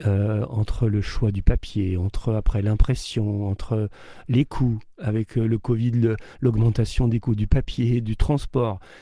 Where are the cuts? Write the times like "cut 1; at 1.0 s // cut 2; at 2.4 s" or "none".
none